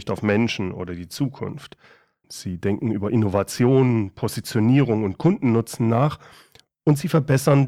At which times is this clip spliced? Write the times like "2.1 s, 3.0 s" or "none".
2.2 s